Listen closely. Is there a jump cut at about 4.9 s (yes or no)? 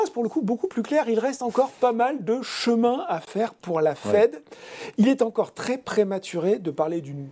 no